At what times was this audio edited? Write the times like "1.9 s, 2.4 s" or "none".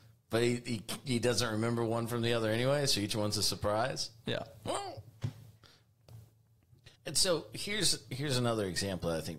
7.0 s